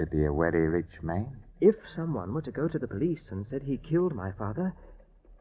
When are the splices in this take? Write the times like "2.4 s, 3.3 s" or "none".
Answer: 1.5 s